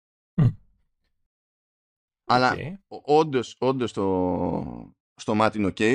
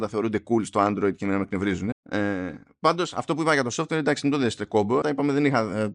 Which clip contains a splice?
second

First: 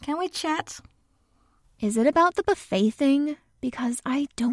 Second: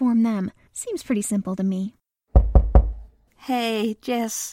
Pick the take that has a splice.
second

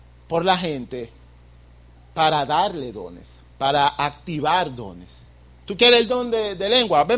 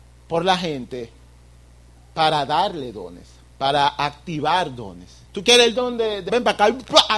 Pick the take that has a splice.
second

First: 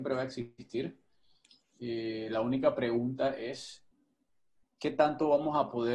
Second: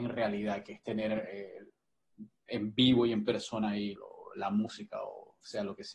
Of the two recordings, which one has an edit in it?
second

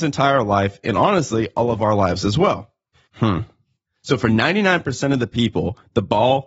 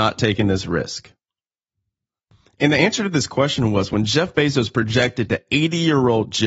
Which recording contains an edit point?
first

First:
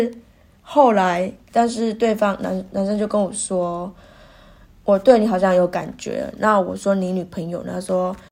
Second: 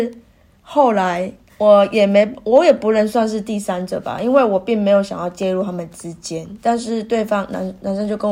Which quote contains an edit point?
first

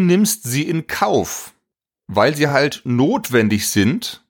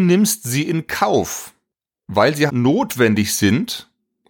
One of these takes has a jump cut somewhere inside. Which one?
second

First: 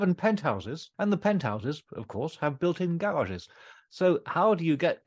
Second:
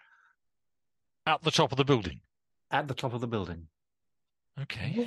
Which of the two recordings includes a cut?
first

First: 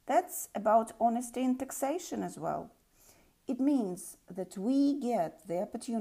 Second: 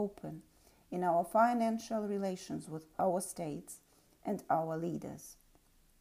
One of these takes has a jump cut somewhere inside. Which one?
second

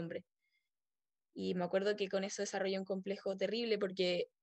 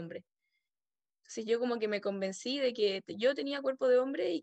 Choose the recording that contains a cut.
second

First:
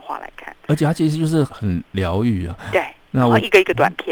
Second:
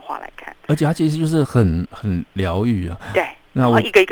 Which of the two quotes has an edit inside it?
first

